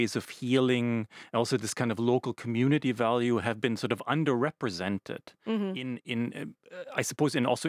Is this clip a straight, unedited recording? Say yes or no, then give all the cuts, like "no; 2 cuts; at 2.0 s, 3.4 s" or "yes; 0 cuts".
yes; 0 cuts